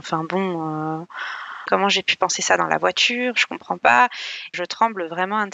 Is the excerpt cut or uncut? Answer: cut